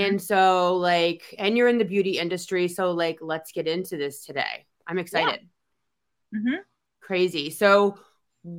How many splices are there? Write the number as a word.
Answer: zero